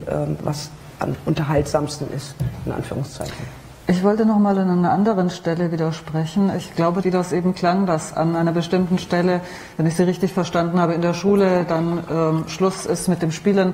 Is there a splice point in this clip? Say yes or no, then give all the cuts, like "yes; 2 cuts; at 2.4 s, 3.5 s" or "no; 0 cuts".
yes; 1 cut; at 7.0 s